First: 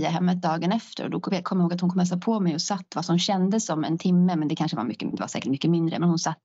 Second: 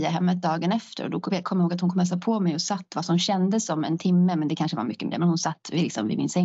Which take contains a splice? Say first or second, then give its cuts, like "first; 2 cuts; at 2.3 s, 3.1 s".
second; 1 cut; at 5.1 s